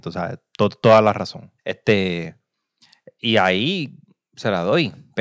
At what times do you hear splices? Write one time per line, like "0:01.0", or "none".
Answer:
0:01.6